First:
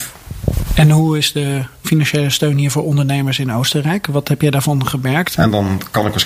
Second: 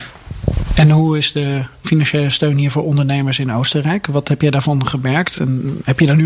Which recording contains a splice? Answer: first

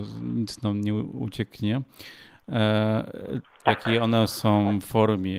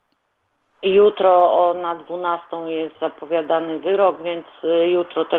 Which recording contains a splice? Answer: first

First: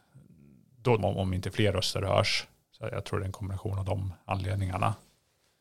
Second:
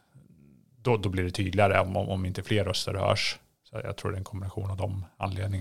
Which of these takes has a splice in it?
first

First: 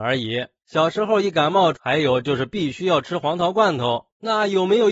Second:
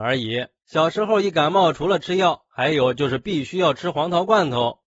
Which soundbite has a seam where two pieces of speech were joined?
first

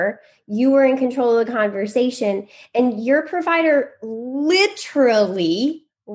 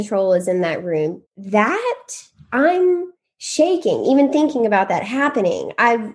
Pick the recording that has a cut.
second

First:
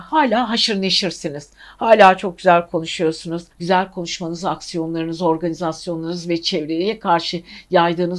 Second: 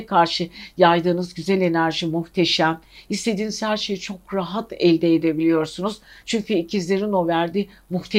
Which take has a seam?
first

